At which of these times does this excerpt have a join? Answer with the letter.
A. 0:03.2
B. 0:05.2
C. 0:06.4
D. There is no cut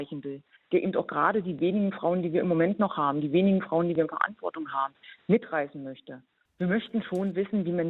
C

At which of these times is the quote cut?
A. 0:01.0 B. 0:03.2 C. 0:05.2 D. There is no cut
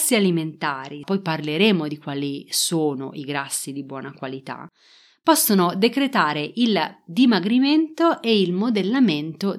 A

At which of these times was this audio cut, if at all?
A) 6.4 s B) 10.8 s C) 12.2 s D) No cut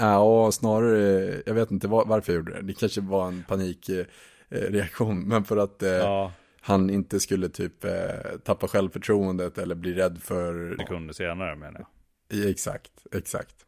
B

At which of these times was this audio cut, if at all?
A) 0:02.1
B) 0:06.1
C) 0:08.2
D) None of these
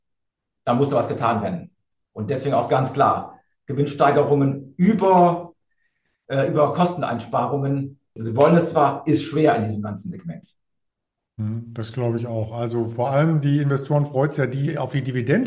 C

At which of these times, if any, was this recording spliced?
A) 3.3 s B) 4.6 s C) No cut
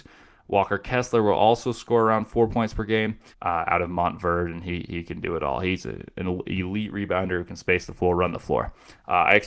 A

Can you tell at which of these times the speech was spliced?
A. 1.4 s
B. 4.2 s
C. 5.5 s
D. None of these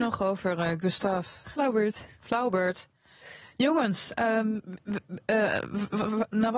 A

